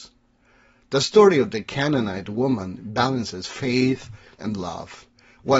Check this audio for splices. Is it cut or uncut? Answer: cut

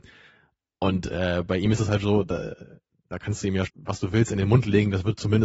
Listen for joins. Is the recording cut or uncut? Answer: cut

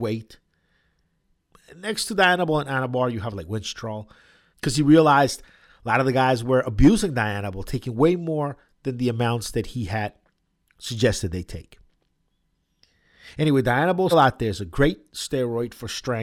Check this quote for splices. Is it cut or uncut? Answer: cut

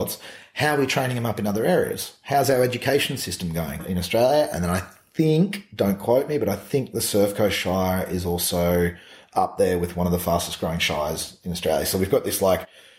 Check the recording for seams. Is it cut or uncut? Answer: cut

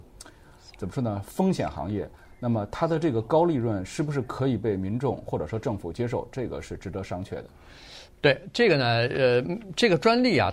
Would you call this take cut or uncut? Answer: uncut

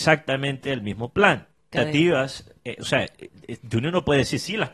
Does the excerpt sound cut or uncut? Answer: cut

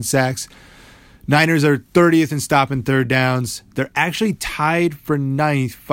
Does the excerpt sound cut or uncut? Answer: uncut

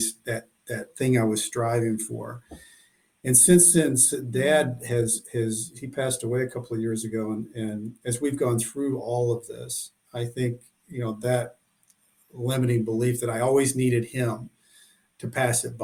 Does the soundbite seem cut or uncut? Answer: uncut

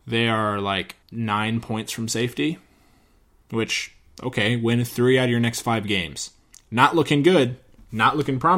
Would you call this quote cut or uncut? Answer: cut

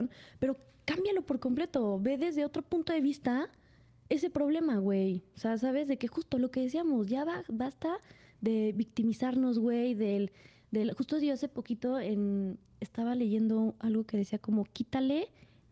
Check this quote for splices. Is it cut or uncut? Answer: uncut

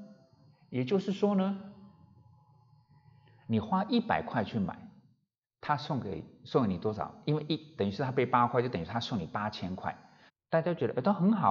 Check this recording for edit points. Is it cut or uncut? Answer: cut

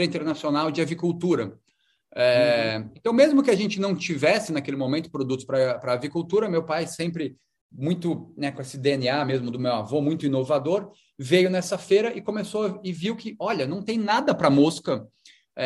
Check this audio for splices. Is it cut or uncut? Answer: uncut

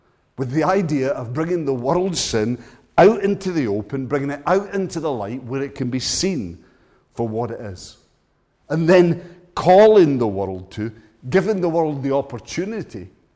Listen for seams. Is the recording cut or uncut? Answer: uncut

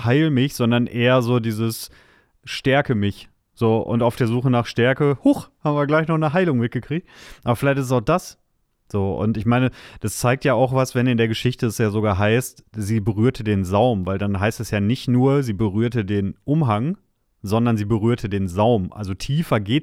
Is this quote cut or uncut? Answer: uncut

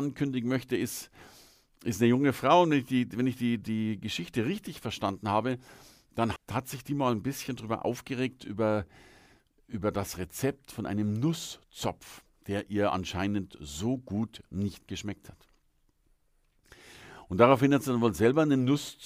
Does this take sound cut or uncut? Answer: cut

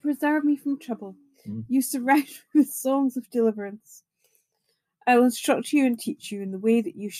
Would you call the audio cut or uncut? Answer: uncut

